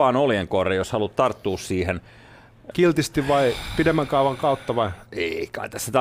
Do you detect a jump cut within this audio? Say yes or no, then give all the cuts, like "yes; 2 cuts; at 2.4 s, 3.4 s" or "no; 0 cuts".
yes; 1 cut; at 2.7 s